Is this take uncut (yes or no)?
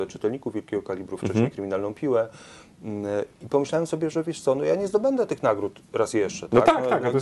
yes